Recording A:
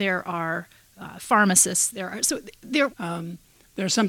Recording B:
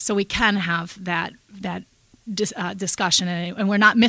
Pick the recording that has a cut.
A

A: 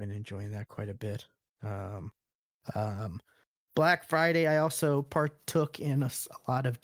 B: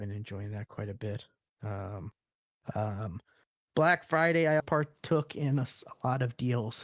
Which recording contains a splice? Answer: B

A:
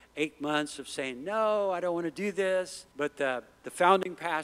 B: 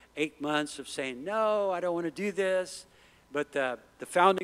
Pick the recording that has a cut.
A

